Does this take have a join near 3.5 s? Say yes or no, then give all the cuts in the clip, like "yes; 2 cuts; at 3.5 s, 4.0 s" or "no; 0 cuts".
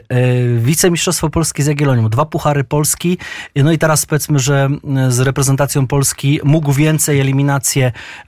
no; 0 cuts